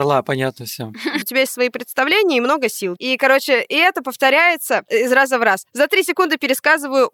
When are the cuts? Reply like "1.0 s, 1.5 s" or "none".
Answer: 1.2 s, 3.0 s